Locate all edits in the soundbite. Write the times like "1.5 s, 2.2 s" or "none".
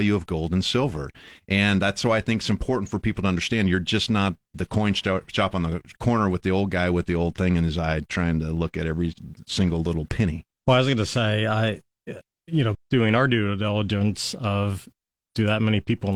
10.5 s, 12.7 s